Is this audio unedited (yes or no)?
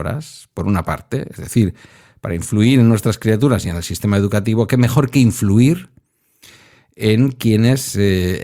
yes